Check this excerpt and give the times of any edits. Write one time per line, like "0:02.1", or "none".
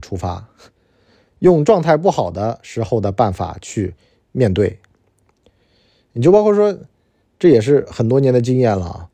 none